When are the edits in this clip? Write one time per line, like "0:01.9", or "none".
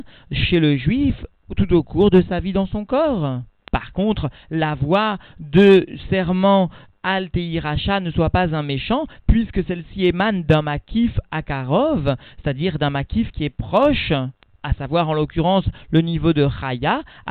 none